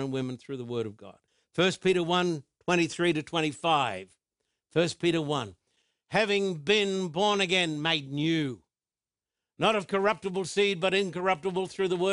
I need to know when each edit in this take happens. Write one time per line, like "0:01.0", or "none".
none